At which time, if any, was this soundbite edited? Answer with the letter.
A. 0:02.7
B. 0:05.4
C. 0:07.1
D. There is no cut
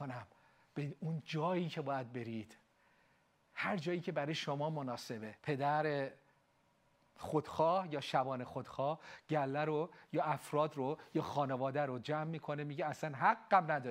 B